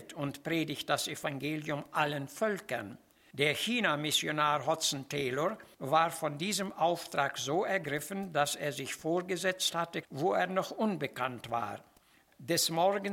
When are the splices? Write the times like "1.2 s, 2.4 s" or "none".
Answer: 10.0 s